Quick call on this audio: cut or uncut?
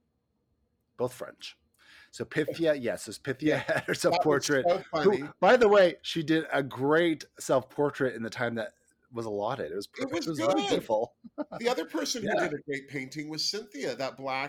uncut